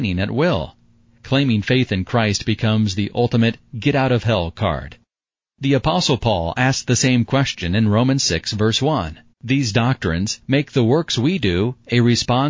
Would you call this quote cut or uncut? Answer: cut